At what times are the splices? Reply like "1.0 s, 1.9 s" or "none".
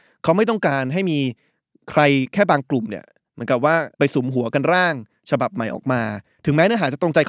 3.9 s